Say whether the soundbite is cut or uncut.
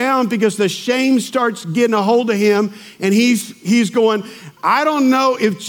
uncut